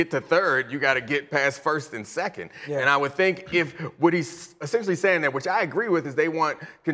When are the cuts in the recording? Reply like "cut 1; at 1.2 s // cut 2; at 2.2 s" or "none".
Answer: none